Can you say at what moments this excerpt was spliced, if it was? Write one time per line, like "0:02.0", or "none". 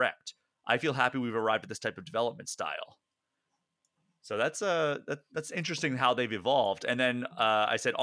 none